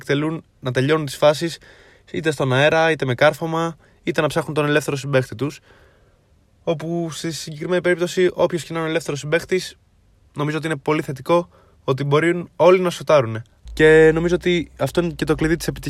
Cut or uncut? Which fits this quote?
cut